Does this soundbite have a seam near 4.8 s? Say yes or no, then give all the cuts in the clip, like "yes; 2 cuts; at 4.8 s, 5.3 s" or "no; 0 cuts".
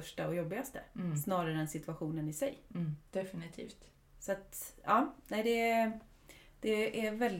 no; 1 cut; at 3.1 s